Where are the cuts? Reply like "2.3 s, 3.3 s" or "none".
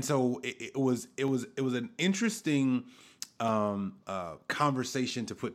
4.0 s